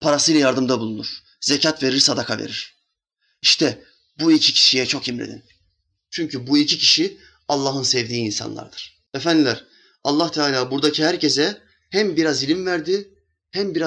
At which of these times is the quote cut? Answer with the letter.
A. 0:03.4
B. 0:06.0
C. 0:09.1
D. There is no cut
C